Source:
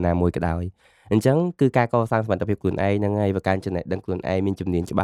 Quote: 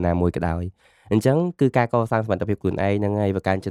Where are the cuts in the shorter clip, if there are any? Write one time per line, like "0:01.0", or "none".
none